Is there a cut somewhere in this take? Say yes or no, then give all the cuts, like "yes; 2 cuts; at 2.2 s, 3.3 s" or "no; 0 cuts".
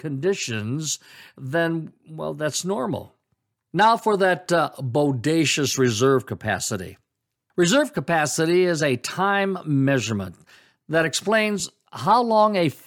no; 0 cuts